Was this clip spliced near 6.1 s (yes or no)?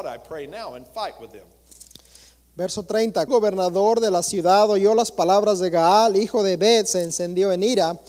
no